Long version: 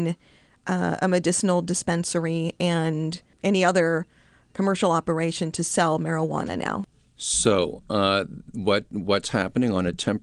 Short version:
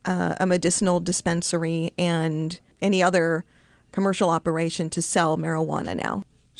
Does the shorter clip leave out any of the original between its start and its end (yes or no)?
no